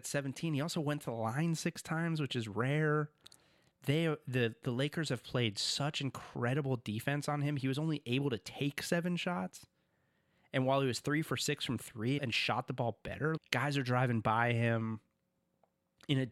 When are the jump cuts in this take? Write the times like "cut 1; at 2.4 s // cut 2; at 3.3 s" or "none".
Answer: cut 1; at 12.2 s // cut 2; at 13.4 s